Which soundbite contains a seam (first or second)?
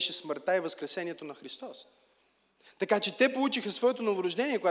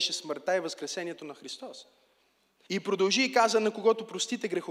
second